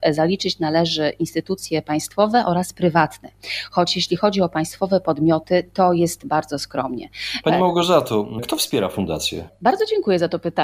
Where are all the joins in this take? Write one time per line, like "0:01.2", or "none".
0:07.4